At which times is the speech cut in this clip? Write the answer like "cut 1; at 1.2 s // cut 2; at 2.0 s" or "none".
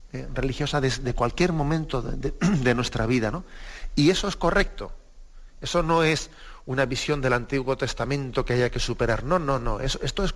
none